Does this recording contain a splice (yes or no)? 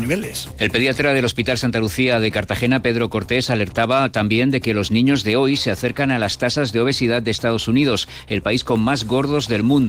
no